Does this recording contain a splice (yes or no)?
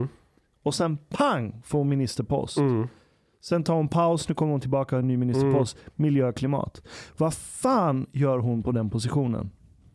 no